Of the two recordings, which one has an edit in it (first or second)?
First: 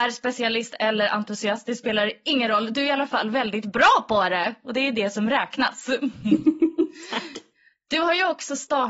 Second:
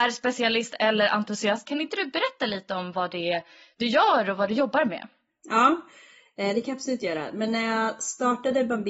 second